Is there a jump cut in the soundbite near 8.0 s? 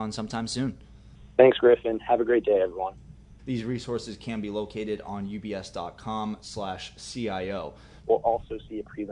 yes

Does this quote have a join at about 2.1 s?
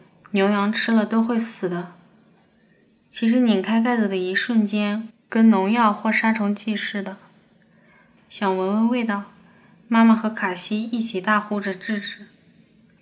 no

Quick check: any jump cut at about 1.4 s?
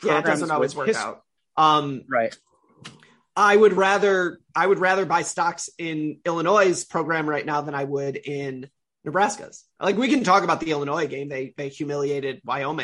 yes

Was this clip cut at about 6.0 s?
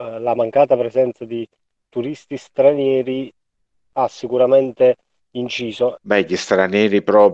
yes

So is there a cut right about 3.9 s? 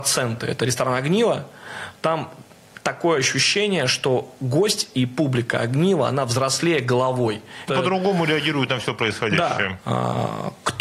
no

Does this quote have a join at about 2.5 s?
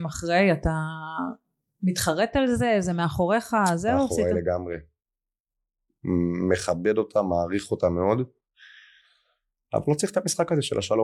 no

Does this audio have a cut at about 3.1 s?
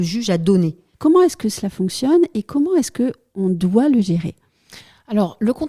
no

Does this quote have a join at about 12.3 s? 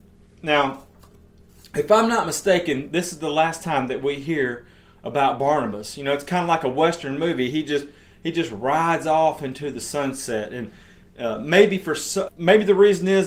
yes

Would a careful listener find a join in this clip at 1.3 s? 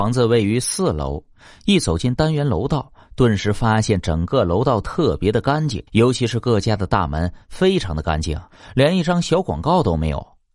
no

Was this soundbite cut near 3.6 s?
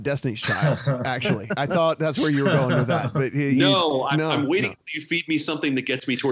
no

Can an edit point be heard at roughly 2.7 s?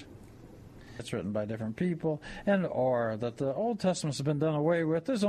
no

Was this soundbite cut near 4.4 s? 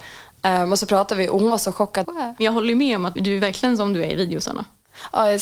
no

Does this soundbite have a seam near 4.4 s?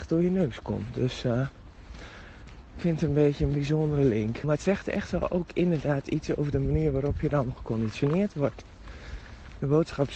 yes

